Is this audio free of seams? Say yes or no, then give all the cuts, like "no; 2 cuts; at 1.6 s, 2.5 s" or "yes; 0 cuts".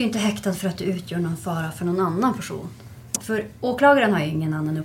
no; 1 cut; at 3.1 s